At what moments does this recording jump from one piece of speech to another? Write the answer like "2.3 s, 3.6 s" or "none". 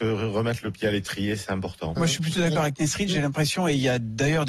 2.0 s

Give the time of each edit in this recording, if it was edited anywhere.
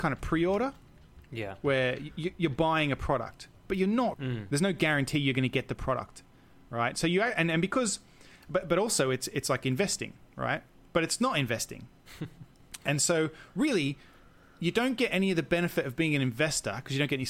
4.1 s

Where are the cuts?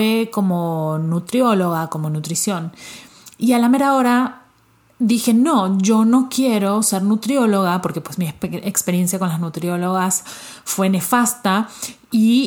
none

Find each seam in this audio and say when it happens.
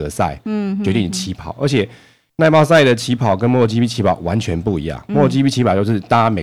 none

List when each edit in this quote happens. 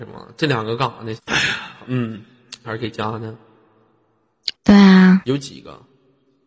1.2 s, 2.6 s, 4.5 s

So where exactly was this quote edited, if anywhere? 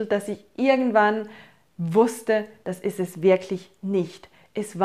2.6 s

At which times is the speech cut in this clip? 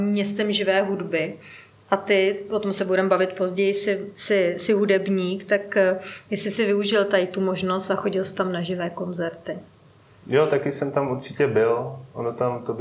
none

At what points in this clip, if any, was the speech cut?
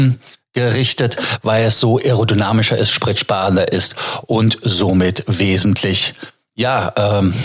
none

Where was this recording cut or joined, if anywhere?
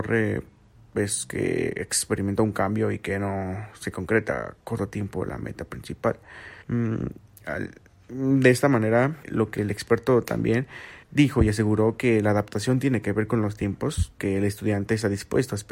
6.6 s, 9.2 s, 11.0 s

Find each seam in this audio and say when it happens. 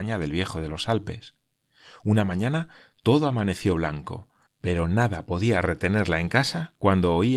4.5 s

